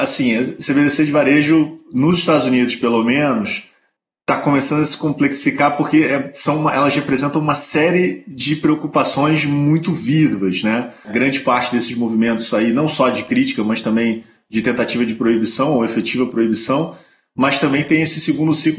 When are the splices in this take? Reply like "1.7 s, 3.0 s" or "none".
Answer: 11.0 s